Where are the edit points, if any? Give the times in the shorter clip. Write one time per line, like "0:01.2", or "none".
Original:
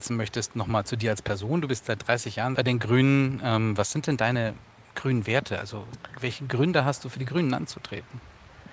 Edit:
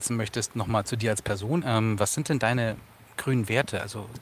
0:01.6